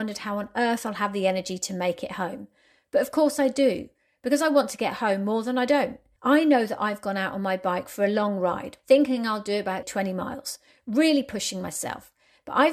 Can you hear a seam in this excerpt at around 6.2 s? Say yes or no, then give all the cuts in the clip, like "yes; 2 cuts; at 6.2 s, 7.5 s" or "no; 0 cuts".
yes; 3 cuts; at 6.2 s, 8.8 s, 9.8 s